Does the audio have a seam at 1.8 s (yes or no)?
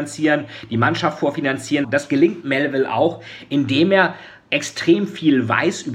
yes